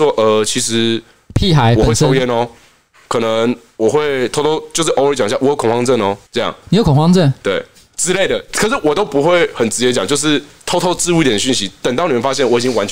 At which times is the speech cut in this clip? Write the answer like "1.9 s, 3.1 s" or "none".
6.3 s